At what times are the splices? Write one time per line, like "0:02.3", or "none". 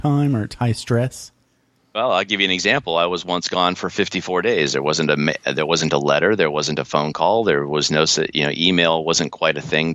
none